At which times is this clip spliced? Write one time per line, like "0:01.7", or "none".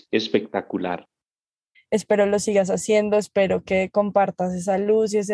0:01.7